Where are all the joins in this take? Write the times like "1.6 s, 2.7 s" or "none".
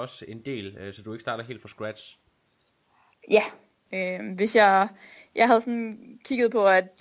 3.9 s